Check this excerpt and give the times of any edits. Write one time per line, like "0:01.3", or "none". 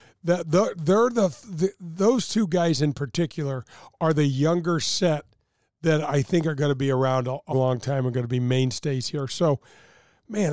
0:07.5